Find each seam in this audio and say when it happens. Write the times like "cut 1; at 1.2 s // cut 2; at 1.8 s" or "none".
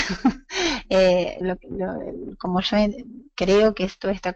cut 1; at 1.4 s